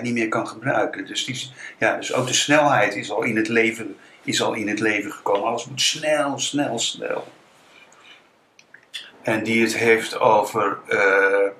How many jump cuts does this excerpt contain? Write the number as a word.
one